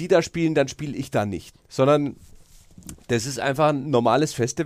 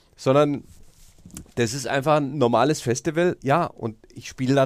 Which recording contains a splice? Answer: first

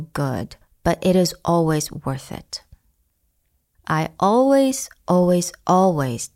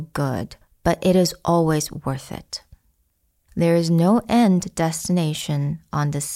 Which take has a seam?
second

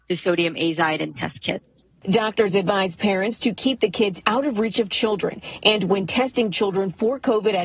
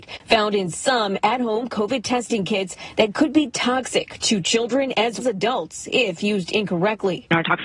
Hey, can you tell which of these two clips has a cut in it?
second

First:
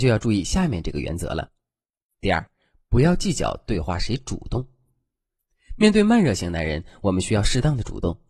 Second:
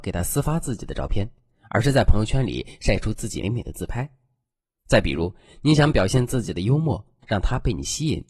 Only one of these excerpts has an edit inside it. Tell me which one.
second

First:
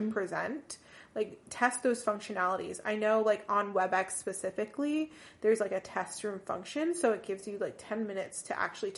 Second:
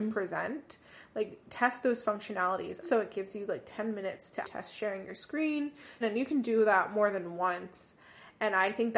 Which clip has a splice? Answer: second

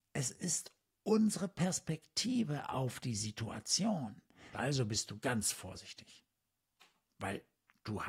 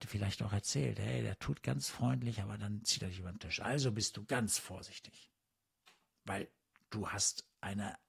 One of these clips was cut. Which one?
first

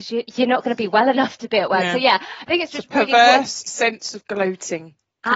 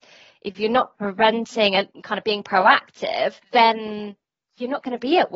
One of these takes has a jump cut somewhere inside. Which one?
second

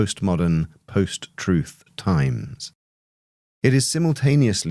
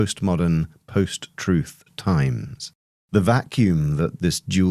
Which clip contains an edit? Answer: second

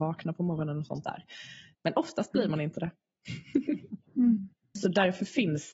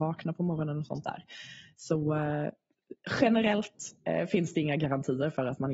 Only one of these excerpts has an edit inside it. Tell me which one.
first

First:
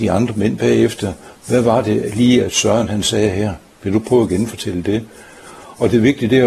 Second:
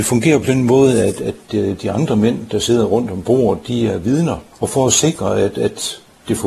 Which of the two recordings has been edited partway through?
second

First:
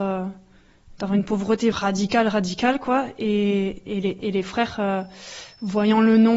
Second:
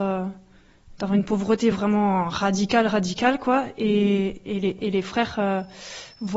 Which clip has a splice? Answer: first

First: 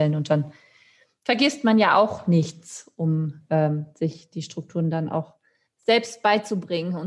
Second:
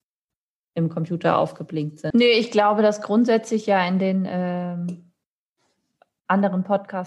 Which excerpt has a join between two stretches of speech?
second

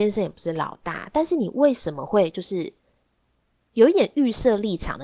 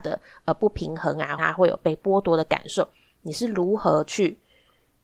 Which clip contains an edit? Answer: second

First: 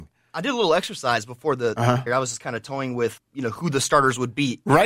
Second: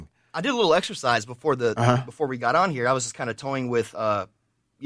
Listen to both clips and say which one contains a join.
first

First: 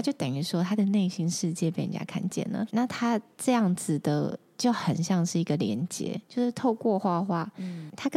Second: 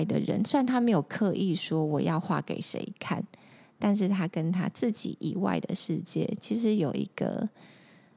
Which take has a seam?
first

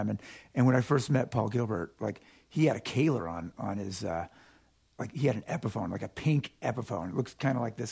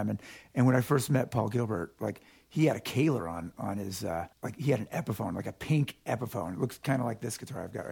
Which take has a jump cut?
second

